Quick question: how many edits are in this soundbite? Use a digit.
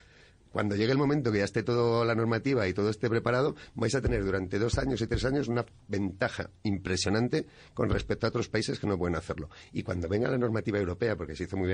0